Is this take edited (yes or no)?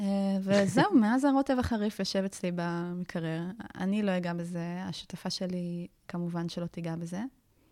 yes